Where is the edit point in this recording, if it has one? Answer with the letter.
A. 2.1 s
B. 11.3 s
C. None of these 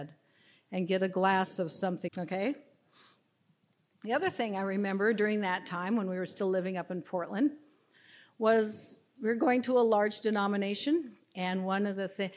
A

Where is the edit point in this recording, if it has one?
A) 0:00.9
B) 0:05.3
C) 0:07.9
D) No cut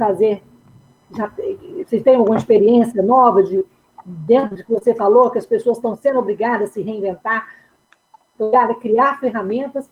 A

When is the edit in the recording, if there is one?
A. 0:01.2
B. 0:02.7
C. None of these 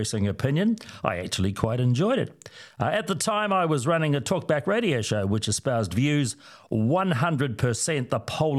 C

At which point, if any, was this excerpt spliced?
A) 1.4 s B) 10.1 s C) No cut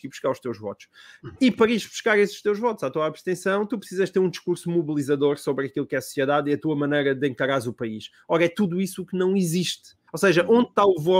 B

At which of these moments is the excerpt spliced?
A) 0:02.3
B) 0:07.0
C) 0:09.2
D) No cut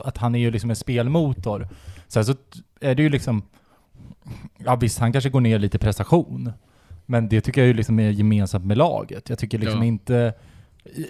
D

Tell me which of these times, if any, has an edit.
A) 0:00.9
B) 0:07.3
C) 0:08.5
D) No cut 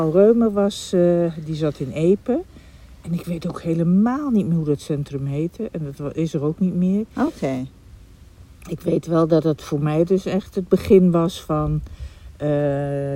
D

